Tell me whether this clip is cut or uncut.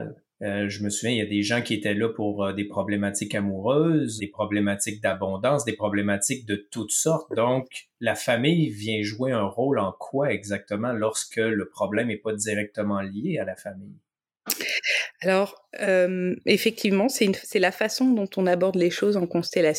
cut